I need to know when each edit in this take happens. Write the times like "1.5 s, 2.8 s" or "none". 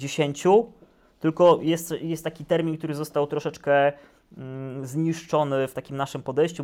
none